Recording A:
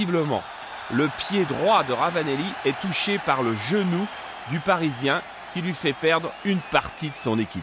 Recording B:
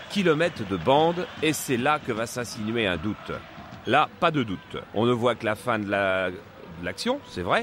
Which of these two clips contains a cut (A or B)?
B